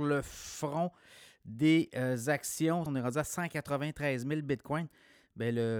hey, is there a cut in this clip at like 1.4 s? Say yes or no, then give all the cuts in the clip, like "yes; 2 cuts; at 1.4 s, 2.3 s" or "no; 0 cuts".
no; 1 cut; at 2.9 s